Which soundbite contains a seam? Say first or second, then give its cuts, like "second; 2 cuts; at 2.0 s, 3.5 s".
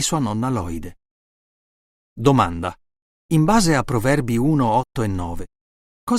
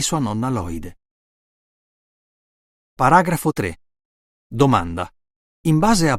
first; 1 cut; at 1.9 s